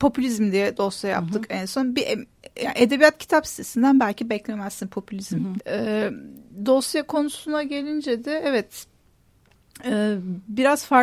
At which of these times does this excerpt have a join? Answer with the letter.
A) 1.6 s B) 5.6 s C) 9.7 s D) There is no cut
B